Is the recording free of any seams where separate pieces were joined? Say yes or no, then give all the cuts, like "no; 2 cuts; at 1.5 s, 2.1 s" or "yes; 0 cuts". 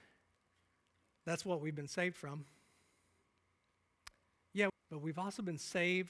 no; 1 cut; at 4.7 s